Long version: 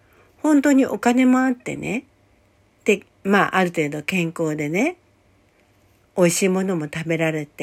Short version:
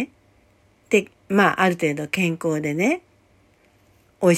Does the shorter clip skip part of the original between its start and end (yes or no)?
no